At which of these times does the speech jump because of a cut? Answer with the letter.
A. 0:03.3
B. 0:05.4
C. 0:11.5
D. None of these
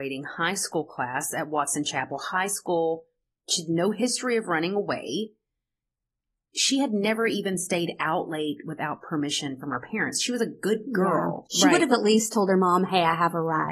C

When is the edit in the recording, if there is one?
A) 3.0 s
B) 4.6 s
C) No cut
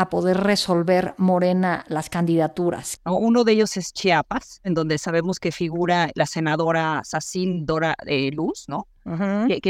A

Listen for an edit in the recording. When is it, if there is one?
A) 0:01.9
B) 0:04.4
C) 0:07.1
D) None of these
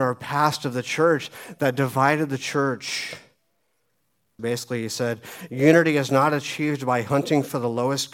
B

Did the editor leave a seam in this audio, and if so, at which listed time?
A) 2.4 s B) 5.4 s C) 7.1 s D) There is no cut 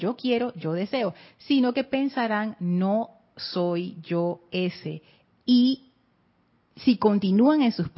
B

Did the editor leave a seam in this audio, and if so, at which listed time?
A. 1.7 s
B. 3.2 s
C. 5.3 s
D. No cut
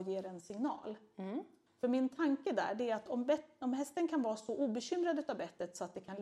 A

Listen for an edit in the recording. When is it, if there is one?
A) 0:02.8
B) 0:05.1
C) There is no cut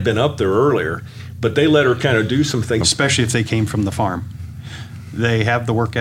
A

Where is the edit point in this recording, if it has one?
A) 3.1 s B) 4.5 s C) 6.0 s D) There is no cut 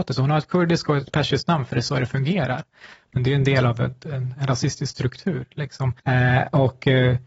C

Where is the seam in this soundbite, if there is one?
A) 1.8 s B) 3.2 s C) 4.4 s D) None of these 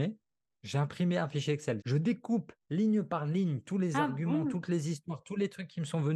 A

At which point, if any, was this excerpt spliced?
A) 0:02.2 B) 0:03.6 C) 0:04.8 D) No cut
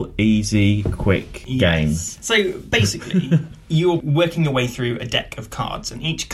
D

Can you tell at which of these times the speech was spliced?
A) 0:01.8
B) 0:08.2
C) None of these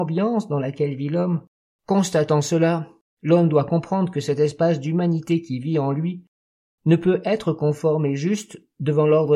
A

